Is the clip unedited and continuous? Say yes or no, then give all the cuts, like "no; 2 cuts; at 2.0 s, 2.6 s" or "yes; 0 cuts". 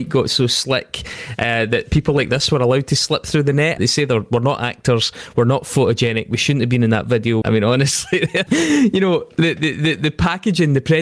no; 3 cuts; at 3.8 s, 7.4 s, 8.5 s